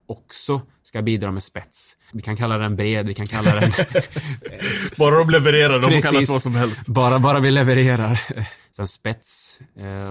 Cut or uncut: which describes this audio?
cut